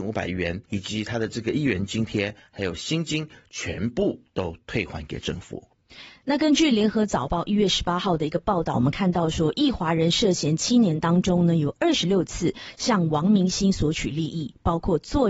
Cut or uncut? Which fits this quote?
uncut